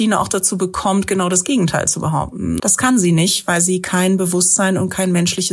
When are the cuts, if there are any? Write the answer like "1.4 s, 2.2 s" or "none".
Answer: 2.6 s